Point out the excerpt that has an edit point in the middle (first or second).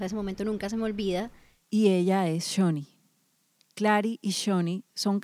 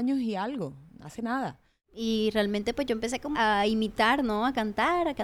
second